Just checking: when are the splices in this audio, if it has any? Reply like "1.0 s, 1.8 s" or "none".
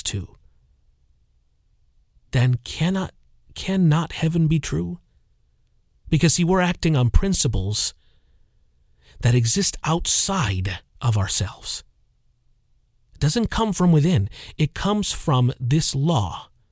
10.9 s